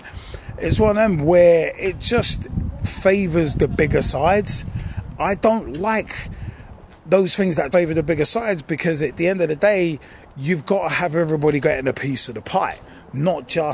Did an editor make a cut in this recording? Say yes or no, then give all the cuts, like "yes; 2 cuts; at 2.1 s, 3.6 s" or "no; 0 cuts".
yes; 2 cuts; at 5.1 s, 7.7 s